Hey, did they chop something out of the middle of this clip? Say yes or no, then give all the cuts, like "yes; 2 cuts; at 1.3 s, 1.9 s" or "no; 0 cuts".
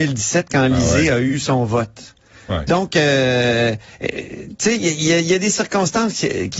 no; 0 cuts